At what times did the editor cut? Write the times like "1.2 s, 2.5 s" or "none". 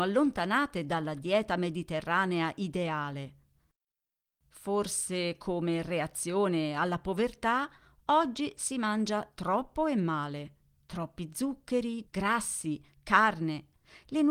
12.0 s